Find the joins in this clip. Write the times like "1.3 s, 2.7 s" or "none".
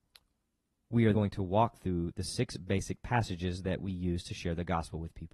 1.1 s